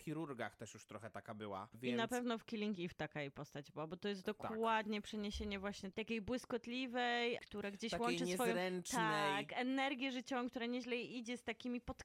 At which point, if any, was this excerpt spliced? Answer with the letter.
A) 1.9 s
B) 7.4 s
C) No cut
B